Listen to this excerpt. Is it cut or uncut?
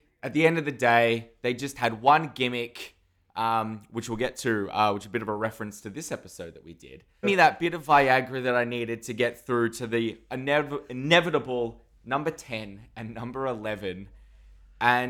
cut